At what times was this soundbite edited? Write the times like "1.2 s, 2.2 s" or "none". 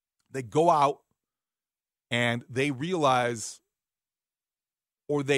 none